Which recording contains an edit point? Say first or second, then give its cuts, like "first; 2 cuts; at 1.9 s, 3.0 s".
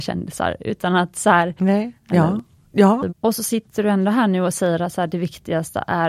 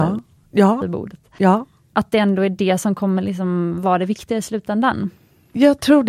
first; 2 cuts; at 2.0 s, 3.1 s